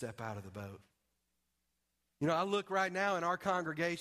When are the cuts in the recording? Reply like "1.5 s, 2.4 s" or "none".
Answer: none